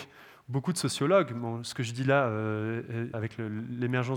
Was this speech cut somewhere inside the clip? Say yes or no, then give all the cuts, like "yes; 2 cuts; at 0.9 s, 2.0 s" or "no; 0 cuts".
yes; 1 cut; at 3.1 s